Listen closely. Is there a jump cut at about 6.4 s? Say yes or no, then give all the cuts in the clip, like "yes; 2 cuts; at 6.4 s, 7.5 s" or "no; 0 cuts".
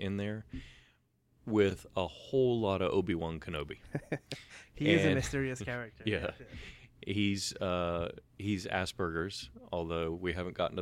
no; 0 cuts